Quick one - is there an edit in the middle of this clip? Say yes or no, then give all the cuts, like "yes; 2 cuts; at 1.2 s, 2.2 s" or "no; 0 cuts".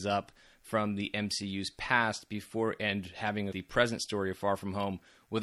yes; 1 cut; at 3.5 s